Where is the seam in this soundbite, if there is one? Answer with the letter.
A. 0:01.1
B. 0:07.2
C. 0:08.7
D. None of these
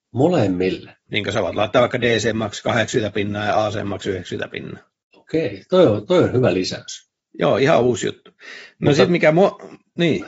A